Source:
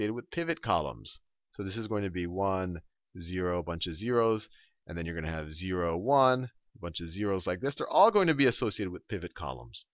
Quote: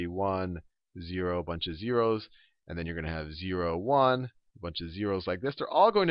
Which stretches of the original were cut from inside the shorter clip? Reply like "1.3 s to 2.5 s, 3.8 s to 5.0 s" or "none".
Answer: none